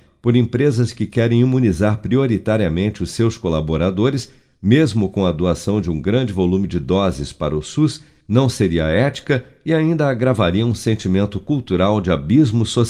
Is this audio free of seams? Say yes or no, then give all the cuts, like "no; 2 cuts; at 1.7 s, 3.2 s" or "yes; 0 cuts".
yes; 0 cuts